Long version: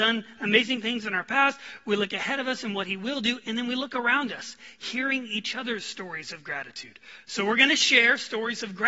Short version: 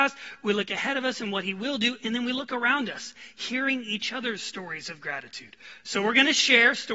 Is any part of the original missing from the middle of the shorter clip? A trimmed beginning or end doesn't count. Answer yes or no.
no